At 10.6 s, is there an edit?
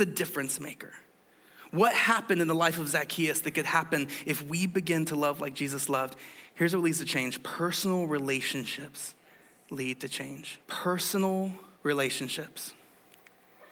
yes; 2 cuts; at 10.6 s, 11.7 s

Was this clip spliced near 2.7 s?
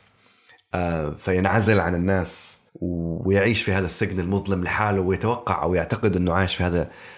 yes; 1 cut; at 2.7 s

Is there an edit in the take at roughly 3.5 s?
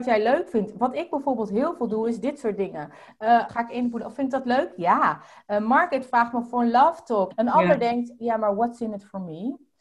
yes; 2 cuts; at 3.5 s, 7.3 s

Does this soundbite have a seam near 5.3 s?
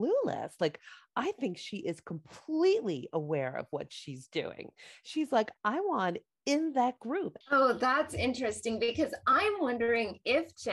no; 1 cut; at 7.4 s

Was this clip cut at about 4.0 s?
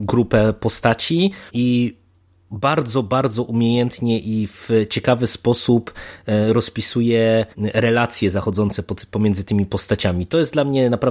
no; 2 cuts; at 1.5 s, 7.5 s

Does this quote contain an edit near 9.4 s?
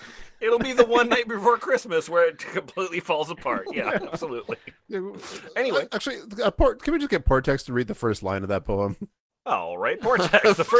no; 0 cuts

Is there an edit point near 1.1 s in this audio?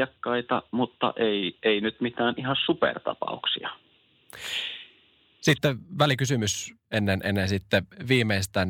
no; 0 cuts

